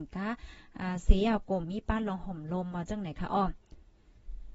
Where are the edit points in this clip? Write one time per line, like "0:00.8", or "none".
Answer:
0:01.6